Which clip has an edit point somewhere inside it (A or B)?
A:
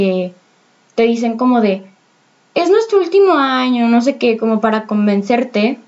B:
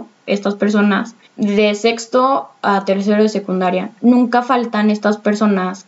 B